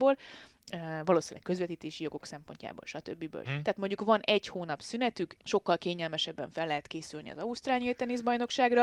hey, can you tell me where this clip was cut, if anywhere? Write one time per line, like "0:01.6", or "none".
0:03.4
0:05.4